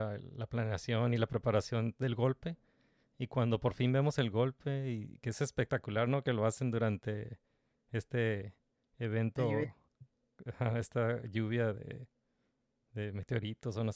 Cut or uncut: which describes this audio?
uncut